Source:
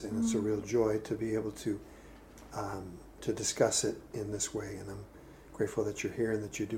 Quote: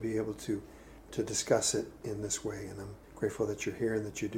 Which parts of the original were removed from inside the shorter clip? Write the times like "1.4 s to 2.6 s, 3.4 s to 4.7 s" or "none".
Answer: 2.2 s to 3.1 s, 5.1 s to 5.4 s